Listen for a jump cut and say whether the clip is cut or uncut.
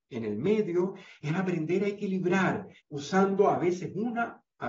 cut